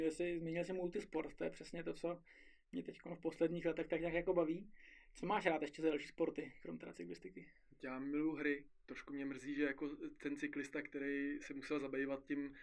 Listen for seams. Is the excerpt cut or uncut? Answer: uncut